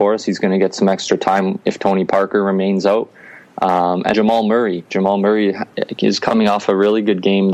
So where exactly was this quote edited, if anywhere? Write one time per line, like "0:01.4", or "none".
0:04.1